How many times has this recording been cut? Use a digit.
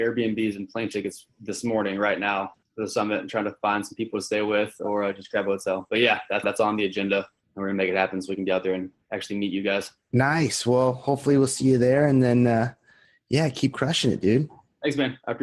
2